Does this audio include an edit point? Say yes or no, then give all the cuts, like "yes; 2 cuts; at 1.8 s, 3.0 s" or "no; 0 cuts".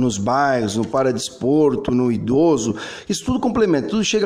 no; 0 cuts